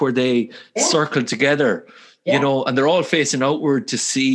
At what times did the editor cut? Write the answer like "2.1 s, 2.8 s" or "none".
none